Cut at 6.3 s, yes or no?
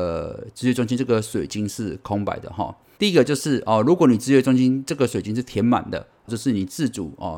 yes